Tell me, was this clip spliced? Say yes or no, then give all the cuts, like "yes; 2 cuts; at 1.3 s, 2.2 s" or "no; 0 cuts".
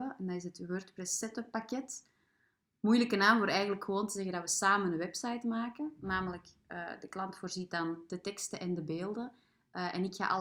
no; 0 cuts